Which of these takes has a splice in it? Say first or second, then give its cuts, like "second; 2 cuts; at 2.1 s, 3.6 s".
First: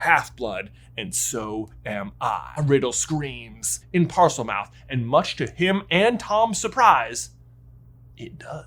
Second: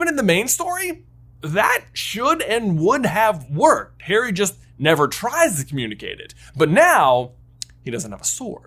first; 2 cuts; at 2.6 s, 3.8 s